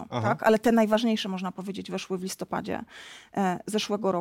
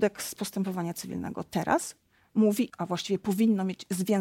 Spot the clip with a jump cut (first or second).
second